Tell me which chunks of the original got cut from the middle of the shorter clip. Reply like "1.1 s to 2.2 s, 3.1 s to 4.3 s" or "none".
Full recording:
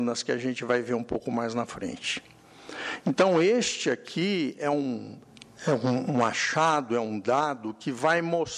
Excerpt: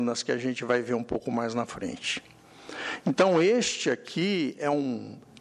none